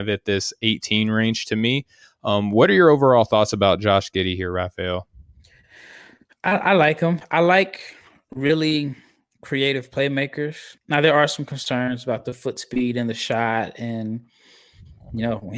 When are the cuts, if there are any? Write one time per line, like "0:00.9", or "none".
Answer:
0:10.8